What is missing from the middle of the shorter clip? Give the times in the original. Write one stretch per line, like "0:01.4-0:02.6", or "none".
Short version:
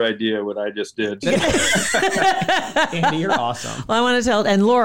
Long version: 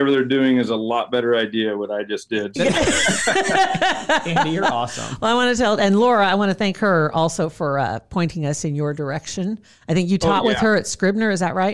none